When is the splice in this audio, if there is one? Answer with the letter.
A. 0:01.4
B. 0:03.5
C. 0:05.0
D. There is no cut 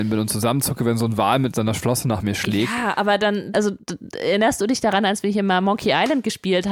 B